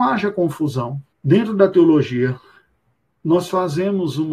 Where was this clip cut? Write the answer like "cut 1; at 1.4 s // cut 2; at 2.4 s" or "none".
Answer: cut 1; at 1.1 s